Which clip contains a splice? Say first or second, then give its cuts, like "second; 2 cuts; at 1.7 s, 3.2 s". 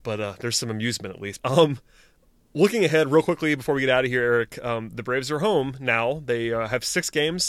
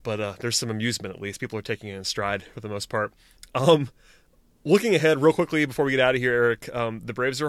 first; 1 cut; at 1.4 s